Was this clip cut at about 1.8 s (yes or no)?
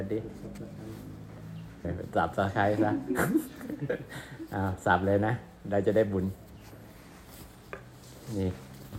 yes